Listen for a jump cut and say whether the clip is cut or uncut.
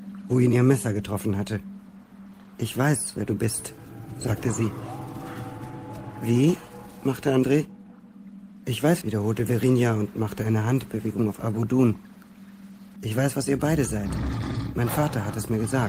cut